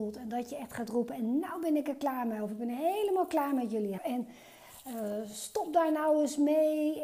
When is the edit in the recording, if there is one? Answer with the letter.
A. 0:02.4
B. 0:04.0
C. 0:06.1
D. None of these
B